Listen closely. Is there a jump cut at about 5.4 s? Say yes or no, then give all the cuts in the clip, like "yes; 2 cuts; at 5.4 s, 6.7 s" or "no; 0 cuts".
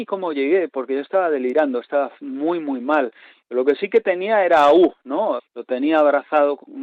yes; 1 cut; at 5.4 s